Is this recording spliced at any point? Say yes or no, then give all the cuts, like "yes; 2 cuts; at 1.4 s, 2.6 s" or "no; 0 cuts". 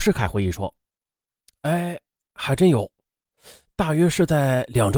no; 0 cuts